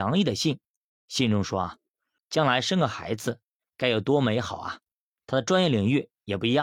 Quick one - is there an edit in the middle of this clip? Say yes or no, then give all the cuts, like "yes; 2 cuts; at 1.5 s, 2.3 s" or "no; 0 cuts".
yes; 3 cuts; at 2.2 s, 3.6 s, 5.1 s